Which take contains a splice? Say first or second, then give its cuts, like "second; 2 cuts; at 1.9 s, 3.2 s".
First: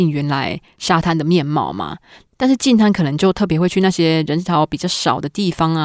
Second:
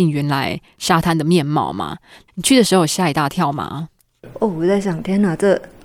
second; 1 cut; at 2.3 s